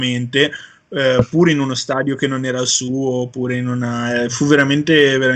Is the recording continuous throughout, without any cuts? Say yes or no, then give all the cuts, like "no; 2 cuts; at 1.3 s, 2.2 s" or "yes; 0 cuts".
yes; 0 cuts